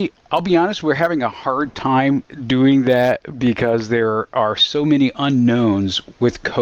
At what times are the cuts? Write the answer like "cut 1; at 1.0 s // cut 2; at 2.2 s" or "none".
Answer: none